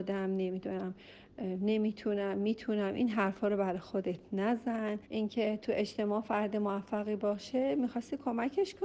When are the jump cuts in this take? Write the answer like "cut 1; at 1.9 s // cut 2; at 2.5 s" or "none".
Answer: cut 1; at 5.0 s